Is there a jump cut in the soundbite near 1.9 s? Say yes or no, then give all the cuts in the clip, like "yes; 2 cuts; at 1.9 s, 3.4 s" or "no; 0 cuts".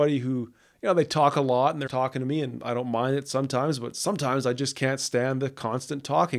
yes; 1 cut; at 1.9 s